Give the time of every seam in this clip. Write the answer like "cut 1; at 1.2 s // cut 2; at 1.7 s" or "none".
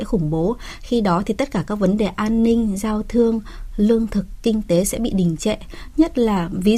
none